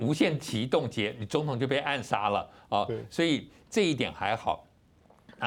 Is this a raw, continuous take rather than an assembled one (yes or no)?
yes